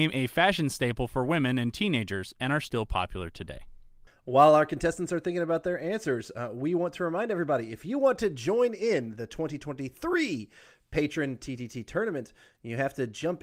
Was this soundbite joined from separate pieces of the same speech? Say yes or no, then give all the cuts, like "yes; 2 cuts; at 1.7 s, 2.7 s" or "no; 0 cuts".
no; 0 cuts